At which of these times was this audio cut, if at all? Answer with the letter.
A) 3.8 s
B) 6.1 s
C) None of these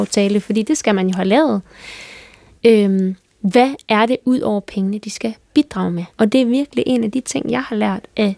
B